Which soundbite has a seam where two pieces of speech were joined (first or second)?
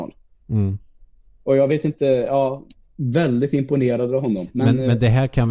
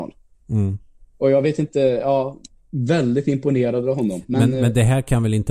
second